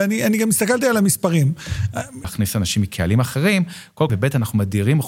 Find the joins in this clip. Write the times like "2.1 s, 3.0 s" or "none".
2.2 s, 4.1 s